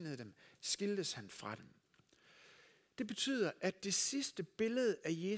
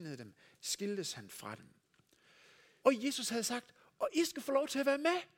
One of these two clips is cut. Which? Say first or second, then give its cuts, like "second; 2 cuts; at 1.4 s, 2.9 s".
second; 1 cut; at 2.8 s